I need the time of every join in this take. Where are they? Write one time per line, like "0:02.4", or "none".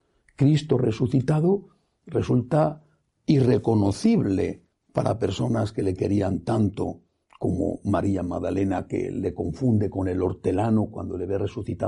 none

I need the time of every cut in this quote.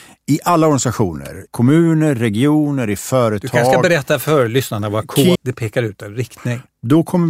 0:01.5
0:05.4

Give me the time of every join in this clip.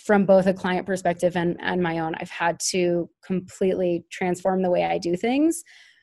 none

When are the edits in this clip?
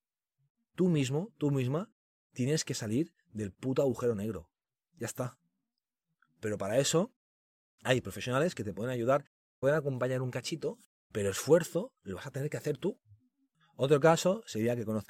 none

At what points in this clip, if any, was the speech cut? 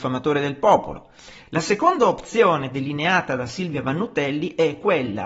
none

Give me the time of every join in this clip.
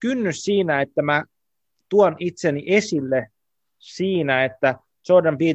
none

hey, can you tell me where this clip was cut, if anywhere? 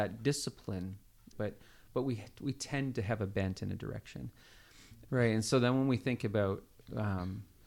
0:01.3
0:05.1

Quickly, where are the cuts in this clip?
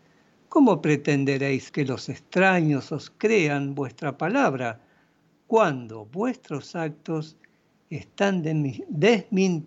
0:01.7

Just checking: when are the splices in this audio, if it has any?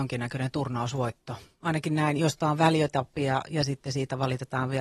none

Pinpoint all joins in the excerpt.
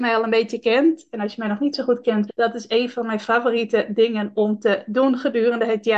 0:02.3

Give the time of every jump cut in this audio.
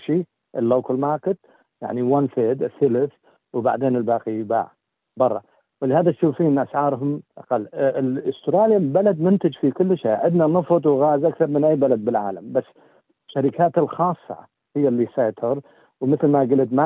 none

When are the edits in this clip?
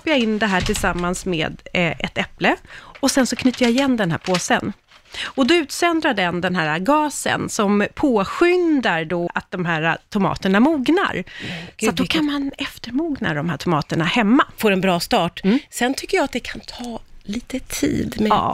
0:09.3
0:14.6

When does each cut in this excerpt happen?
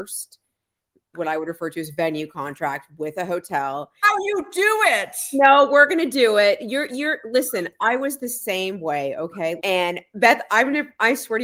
0:04.0
0:09.6

